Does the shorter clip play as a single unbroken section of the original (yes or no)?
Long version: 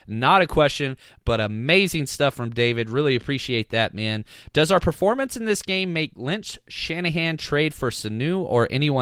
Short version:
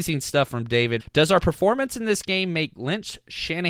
no